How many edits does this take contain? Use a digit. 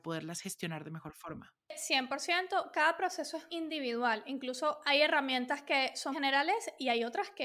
2